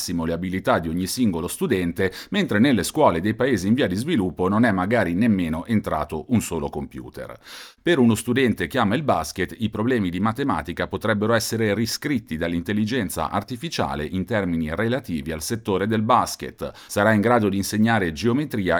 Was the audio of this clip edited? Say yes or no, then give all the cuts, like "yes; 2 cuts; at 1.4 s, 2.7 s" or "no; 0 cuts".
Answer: yes; 2 cuts; at 7.8 s, 16.9 s